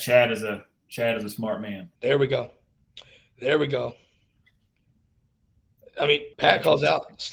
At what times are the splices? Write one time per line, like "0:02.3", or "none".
0:02.0
0:06.3